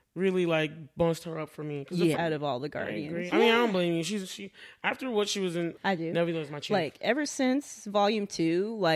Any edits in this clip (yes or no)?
yes